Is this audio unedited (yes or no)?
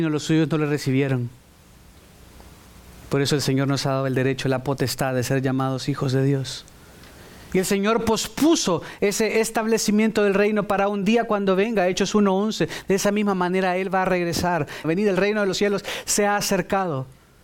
no